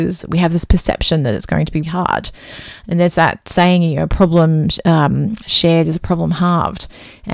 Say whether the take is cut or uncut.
cut